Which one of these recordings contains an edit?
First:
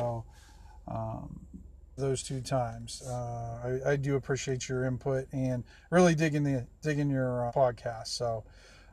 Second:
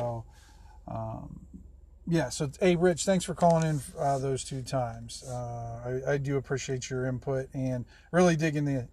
first; 2 cuts; at 2.0 s, 7.5 s

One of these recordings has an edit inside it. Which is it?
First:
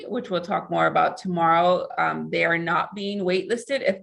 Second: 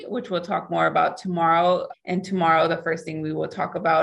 second; 1 cut; at 1.9 s

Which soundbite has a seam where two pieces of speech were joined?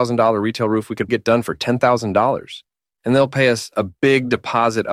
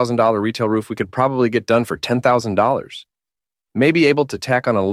first; 2 cuts; at 1.1 s, 3.0 s

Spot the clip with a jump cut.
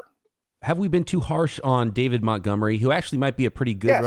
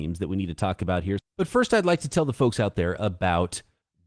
second; 1 cut; at 1.2 s

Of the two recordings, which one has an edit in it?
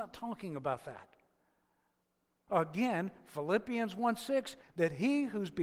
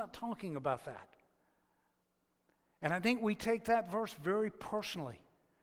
first; 2 cuts; at 2.5 s, 4.6 s

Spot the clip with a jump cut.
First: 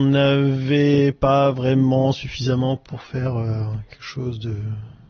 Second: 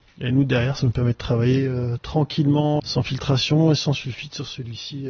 second; 1 cut; at 2.8 s

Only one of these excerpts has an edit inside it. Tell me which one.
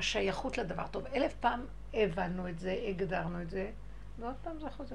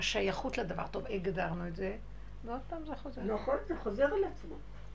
second; 1 cut; at 1.1 s

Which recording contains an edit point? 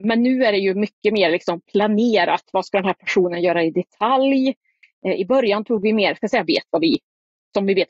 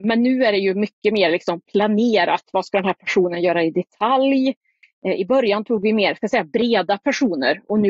first; 1 cut; at 6.5 s

